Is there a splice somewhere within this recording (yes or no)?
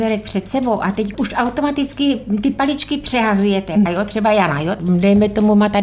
yes